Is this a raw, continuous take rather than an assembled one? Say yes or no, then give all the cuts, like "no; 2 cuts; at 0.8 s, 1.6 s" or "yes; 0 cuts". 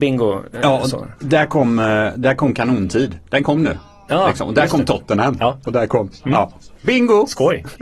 no; 1 cut; at 6.8 s